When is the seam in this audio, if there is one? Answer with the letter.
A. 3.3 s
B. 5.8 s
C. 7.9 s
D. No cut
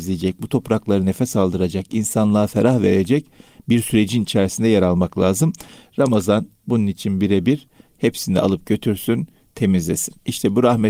C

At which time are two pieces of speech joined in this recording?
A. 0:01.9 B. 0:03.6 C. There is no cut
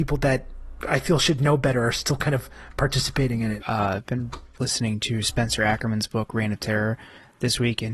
B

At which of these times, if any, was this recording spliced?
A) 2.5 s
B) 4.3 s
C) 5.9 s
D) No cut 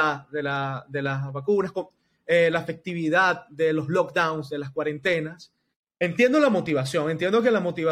C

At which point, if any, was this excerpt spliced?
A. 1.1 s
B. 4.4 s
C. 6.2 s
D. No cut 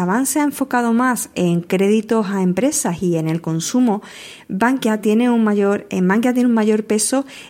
D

